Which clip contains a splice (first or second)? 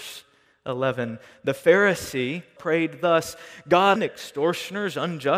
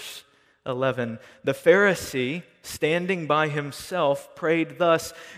first